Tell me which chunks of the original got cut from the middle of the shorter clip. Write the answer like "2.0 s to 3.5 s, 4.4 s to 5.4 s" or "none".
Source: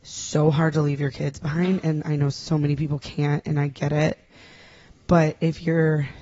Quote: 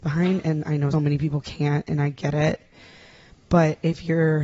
2.3 s to 2.5 s